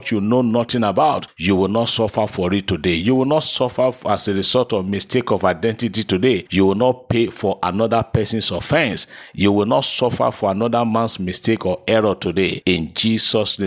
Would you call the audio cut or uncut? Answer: uncut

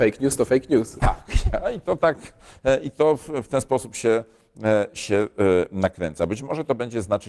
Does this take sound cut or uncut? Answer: uncut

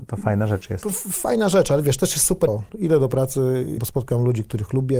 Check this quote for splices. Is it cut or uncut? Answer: cut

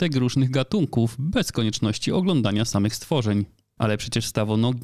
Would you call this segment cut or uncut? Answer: cut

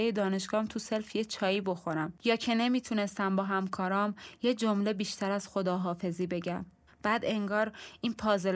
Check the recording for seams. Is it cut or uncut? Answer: cut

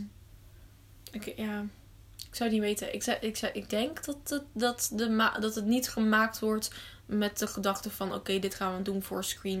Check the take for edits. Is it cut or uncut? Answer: uncut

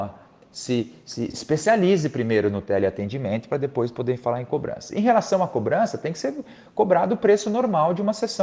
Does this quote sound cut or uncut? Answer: cut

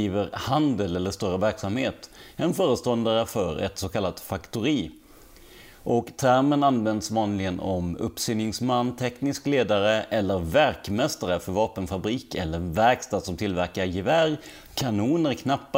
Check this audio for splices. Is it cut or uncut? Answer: uncut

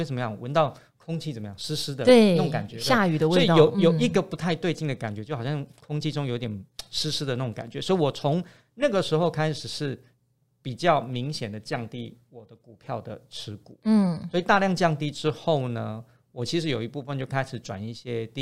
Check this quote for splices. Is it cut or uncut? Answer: uncut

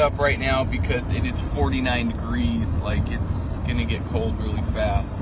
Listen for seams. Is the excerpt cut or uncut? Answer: uncut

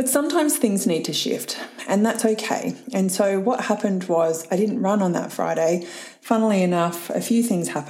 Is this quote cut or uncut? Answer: uncut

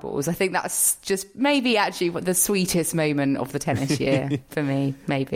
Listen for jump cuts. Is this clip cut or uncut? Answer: uncut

